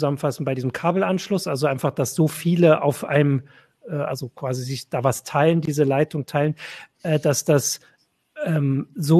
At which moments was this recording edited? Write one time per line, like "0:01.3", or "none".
none